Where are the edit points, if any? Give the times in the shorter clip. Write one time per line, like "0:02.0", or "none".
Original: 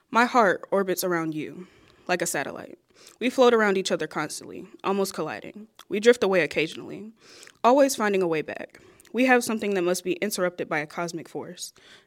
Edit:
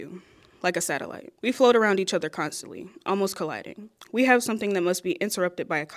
0:01.4
0:04.1